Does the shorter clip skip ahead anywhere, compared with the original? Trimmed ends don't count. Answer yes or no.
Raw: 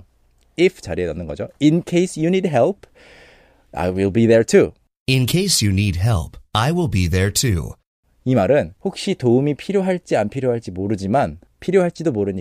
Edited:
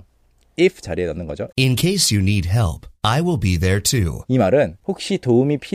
yes